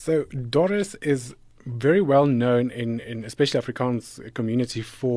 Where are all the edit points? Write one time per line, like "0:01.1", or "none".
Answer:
none